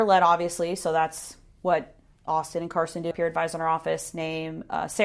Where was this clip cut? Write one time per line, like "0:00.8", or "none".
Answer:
0:03.1